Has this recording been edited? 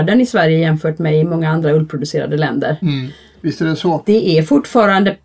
no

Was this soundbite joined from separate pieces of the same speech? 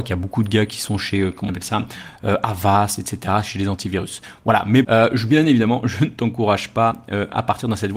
yes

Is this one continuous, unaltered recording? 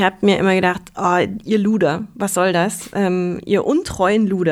yes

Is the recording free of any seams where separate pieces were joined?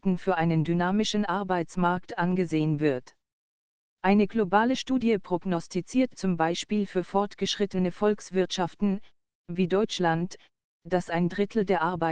yes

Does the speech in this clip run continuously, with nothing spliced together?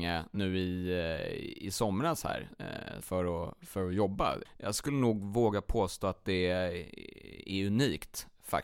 no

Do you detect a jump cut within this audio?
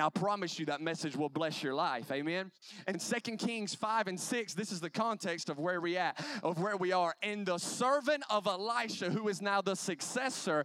yes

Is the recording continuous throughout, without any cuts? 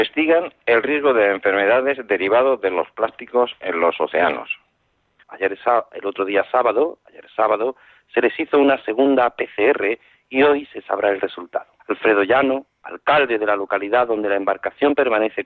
no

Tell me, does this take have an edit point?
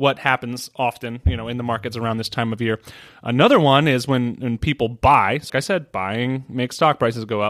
yes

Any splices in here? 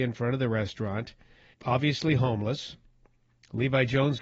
yes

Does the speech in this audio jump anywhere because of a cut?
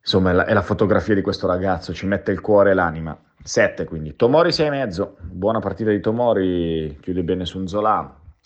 no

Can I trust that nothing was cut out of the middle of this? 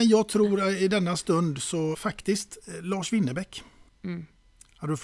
no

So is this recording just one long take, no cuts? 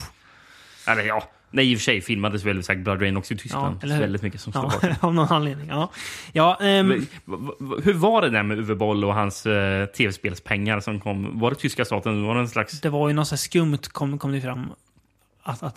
no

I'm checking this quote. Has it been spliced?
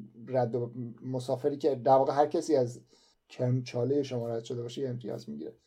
no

